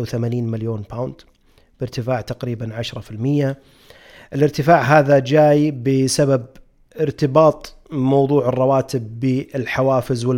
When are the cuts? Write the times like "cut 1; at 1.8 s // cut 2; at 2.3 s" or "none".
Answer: none